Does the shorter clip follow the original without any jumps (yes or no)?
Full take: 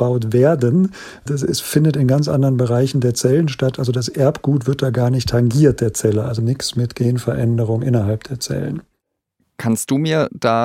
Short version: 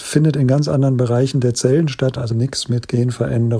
no